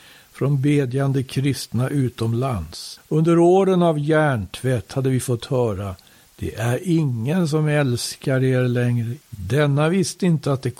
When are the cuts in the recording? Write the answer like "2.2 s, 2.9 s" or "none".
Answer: 3.0 s, 9.2 s